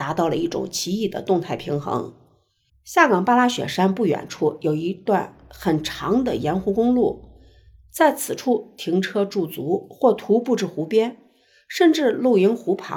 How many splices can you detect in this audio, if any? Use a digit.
1